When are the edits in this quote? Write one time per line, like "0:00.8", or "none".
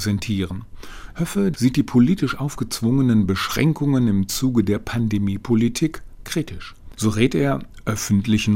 0:01.1
0:07.0